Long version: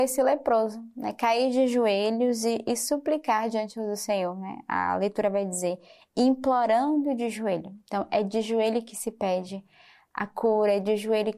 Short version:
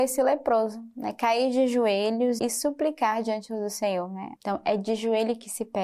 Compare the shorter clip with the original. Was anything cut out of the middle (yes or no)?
yes